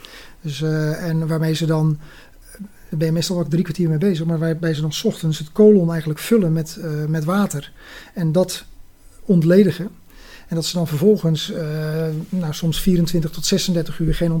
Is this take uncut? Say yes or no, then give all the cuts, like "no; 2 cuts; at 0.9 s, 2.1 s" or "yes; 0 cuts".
yes; 0 cuts